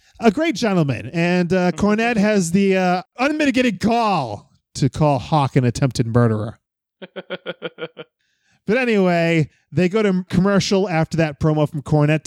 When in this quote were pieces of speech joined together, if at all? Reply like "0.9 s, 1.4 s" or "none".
none